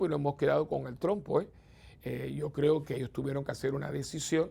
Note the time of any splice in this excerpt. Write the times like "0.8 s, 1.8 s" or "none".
2.0 s